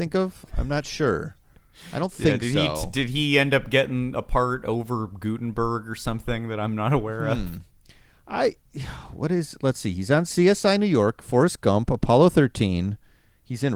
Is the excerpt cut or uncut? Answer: uncut